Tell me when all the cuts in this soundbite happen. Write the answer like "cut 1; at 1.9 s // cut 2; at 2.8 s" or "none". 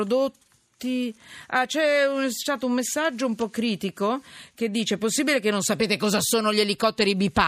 none